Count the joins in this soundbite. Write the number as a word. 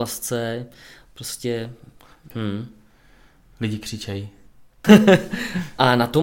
two